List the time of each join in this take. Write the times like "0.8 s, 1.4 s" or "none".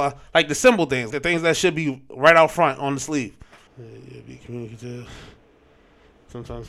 1.1 s, 3.7 s